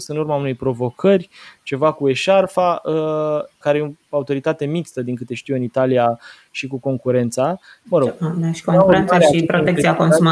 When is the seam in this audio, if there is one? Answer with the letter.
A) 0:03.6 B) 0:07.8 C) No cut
A